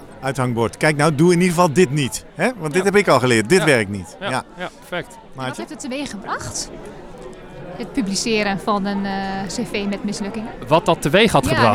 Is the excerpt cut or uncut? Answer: uncut